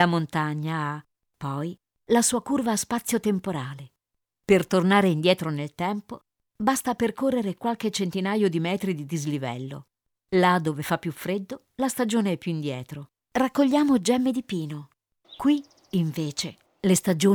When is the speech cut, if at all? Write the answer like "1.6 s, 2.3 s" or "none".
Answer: 13.2 s, 15.2 s